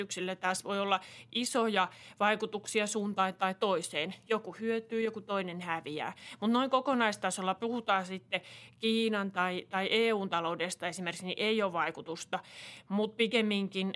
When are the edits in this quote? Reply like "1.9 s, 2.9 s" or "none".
none